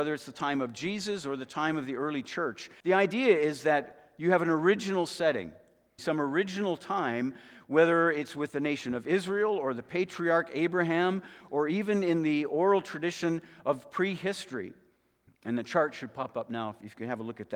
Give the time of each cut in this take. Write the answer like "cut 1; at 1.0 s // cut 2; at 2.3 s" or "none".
cut 1; at 2.8 s // cut 2; at 6.0 s // cut 3; at 15.3 s

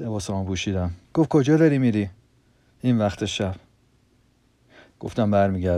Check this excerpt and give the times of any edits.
cut 1; at 1.0 s

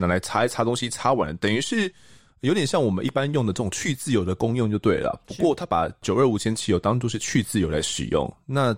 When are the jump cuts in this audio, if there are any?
none

